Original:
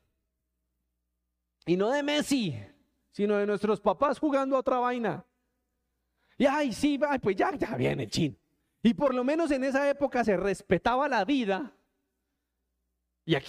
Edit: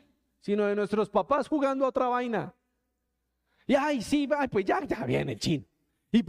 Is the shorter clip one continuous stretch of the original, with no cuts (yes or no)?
yes